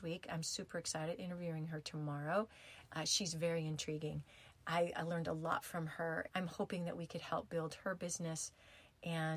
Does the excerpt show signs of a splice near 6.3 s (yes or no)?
yes